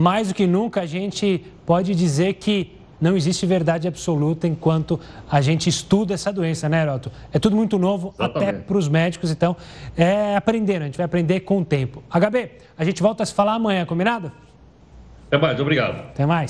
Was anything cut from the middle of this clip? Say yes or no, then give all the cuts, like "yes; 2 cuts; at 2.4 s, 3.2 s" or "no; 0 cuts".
no; 0 cuts